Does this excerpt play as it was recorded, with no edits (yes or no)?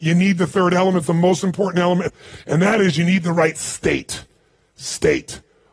yes